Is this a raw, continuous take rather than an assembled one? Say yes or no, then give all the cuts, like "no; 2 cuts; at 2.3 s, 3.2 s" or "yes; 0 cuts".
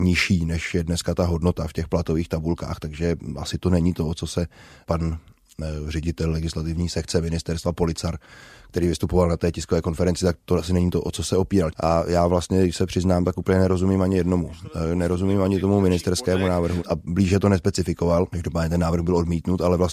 no; 2 cuts; at 11.7 s, 16.8 s